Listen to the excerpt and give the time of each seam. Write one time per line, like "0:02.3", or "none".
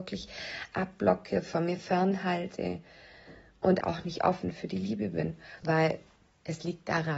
0:03.8
0:05.6